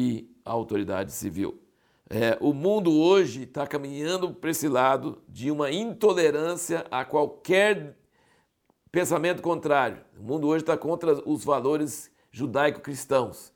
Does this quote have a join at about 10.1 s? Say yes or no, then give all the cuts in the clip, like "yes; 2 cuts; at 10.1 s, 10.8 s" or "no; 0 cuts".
no; 1 cut; at 4.4 s